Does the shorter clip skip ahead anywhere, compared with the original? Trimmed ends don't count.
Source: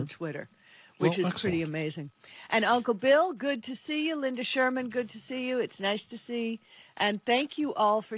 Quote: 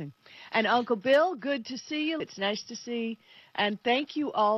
yes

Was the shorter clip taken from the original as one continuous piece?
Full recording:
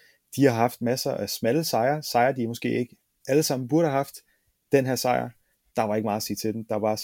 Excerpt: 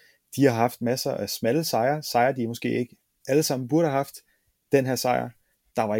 yes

